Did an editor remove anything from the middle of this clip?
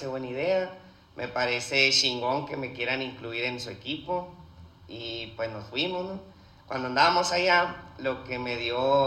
no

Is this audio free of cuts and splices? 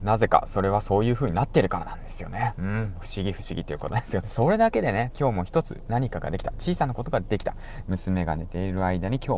no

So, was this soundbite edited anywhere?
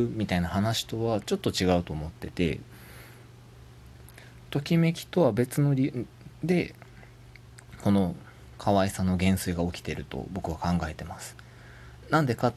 yes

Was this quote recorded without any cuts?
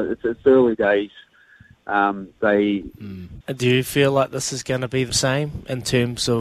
no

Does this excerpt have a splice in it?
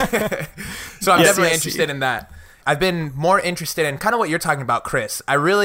yes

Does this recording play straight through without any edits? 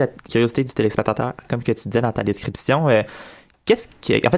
yes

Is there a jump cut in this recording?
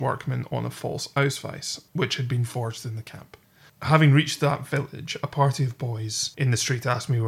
yes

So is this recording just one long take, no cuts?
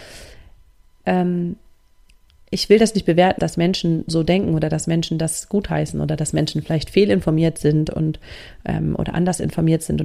no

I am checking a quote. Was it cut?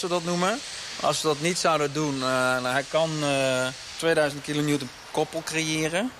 no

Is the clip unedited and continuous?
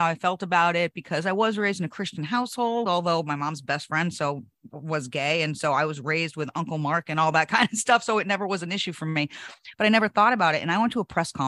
yes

